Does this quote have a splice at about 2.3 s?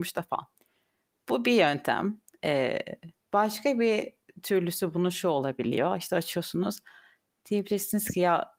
no; 0 cuts

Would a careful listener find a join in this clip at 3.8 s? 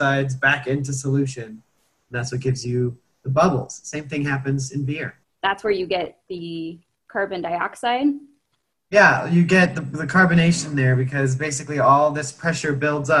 no; 1 cut; at 5.2 s

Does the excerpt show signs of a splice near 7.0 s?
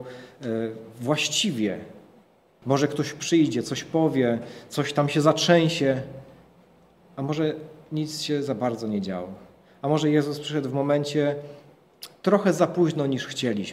no; 1 cut; at 2.6 s

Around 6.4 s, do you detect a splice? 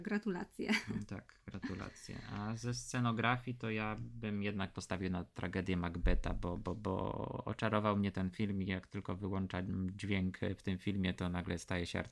no; 0 cuts

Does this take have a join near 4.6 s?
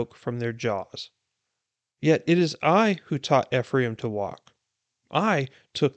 no; 1 cut; at 2.0 s

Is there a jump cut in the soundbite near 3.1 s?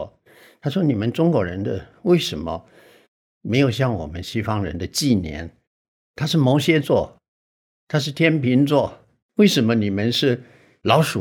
no; 0 cuts

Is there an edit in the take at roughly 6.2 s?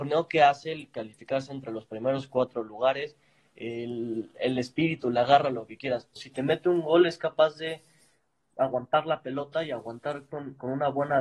yes; 1 cut; at 6.2 s

